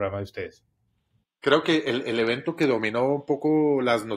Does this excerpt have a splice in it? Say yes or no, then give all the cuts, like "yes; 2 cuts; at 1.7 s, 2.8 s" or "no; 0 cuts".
yes; 1 cut; at 1.2 s